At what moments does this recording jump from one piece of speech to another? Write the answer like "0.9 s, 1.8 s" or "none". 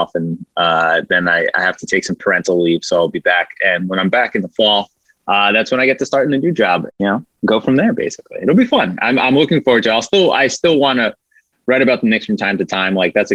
6.9 s